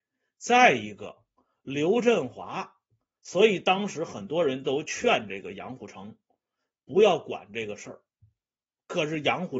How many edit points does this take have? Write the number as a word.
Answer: one